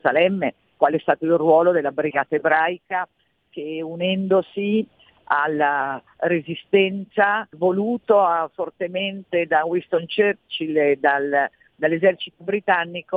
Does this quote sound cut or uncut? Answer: cut